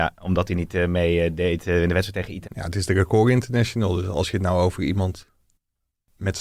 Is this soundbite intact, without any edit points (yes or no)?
no